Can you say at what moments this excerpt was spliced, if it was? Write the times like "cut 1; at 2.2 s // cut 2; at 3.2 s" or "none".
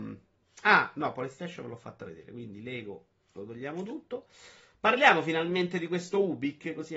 none